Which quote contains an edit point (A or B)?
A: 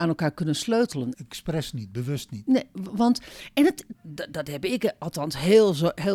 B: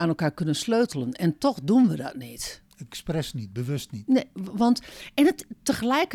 A